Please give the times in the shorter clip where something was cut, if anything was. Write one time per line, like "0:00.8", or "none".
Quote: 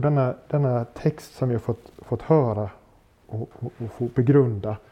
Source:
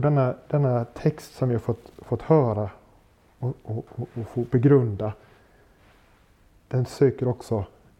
0:03.2